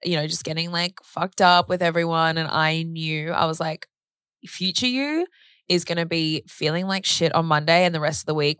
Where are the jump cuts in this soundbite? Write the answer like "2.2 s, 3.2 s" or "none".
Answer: none